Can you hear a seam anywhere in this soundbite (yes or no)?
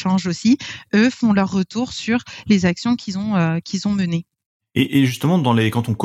no